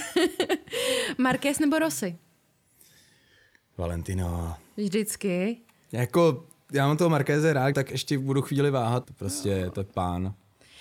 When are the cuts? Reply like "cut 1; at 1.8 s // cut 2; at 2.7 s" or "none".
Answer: cut 1; at 7.7 s // cut 2; at 9.0 s